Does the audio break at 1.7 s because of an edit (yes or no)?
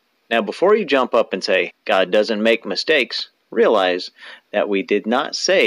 yes